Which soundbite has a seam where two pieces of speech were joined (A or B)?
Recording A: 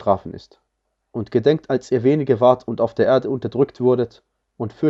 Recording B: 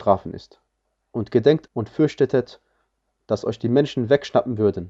B